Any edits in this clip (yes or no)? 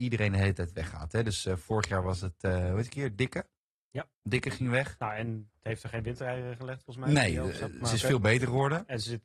no